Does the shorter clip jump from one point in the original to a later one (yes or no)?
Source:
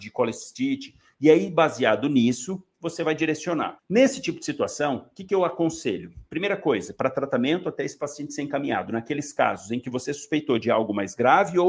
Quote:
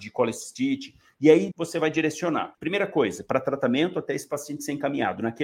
yes